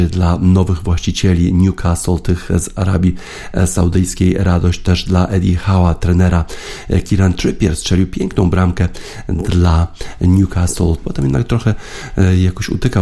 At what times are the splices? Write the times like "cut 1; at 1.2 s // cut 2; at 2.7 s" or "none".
cut 1; at 11.0 s